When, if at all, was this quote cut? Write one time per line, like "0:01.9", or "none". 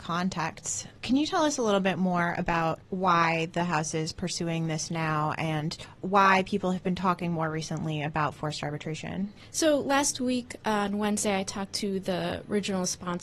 none